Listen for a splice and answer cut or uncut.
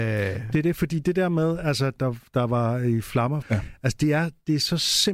cut